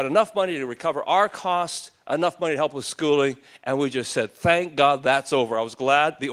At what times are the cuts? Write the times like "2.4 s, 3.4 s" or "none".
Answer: none